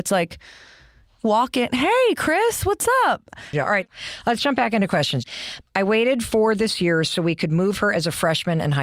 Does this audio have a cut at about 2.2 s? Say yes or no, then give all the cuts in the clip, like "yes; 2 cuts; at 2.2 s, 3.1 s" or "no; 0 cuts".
no; 2 cuts; at 3.5 s, 5.6 s